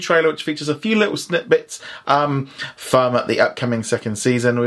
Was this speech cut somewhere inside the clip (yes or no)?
no